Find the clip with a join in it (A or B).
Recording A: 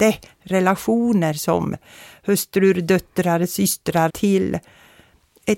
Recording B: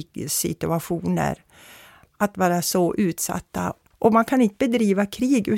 A